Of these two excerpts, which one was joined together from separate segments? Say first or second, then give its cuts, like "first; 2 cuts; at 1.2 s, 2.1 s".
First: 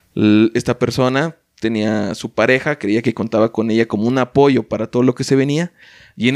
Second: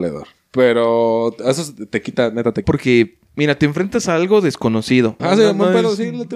second; 2 cuts; at 2.6 s, 5.2 s